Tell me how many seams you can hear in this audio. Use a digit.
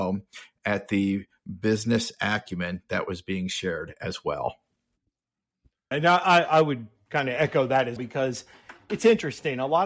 2